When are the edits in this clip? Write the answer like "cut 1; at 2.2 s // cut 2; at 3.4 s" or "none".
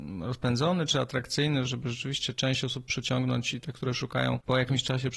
cut 1; at 1.7 s

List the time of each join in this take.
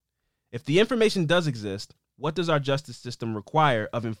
cut 1; at 2.1 s

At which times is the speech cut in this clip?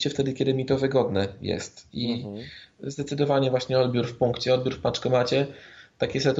none

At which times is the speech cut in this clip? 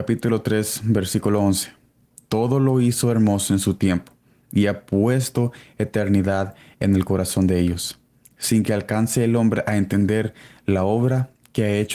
none

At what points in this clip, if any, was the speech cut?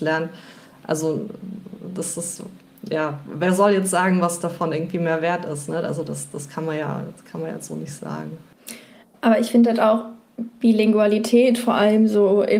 none

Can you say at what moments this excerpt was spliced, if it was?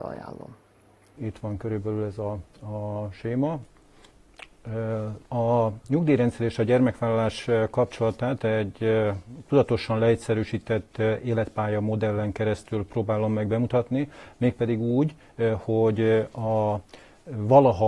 cut 1; at 1.2 s // cut 2; at 5.2 s

